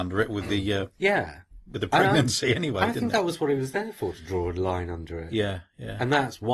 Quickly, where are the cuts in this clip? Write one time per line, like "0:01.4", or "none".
none